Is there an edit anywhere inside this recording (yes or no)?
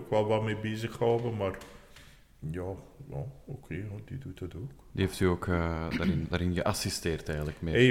yes